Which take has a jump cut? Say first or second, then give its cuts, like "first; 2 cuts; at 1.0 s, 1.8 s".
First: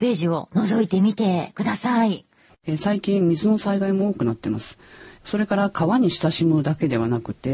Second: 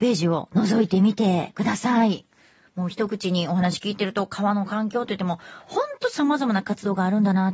first; 2 cuts; at 2.5 s, 5.2 s